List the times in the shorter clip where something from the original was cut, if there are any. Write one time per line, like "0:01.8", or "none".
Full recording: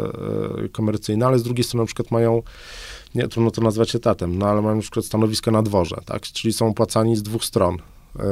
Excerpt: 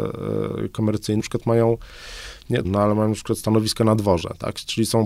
0:01.2
0:02.6